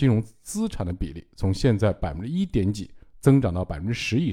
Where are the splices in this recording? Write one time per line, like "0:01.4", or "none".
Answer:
none